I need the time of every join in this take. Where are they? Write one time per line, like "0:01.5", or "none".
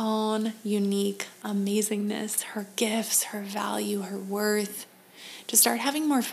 none